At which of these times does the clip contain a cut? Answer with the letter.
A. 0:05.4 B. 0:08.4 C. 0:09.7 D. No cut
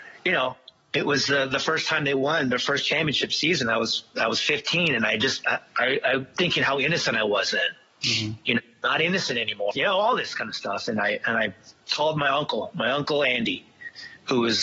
C